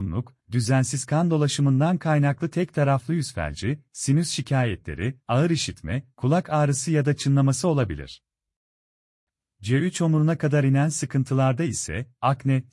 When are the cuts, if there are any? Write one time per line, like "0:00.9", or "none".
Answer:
none